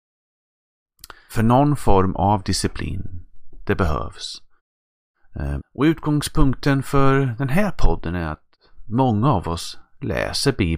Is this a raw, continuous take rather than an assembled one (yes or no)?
no